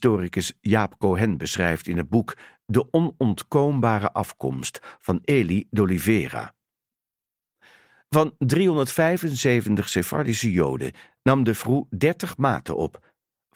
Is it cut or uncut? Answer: uncut